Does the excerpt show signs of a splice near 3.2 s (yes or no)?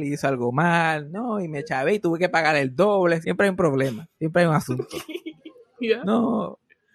yes